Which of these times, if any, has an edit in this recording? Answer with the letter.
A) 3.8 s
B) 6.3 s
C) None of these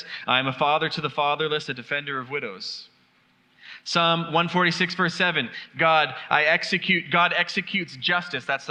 C